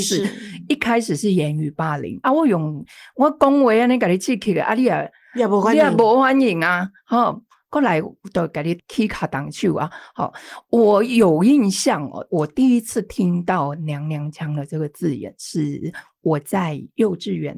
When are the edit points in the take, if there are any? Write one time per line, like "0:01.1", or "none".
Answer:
0:02.2